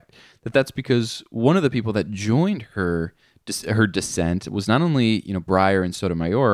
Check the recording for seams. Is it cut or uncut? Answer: uncut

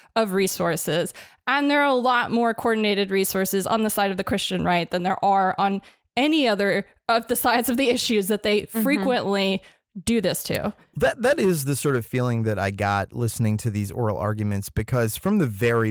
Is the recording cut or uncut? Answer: uncut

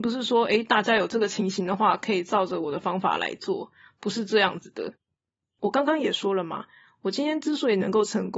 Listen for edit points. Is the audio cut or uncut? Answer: uncut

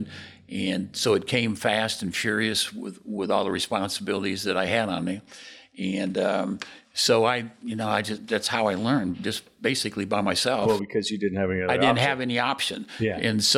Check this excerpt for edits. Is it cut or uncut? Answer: uncut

